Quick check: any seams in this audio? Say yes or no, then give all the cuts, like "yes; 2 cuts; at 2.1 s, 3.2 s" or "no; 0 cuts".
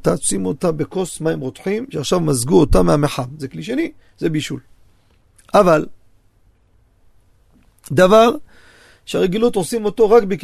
no; 0 cuts